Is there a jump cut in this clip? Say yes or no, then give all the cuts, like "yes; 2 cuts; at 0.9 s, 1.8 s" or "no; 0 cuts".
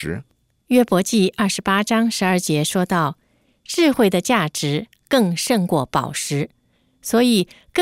no; 0 cuts